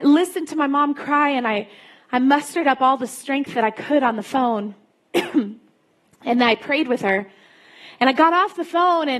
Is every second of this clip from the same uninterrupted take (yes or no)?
yes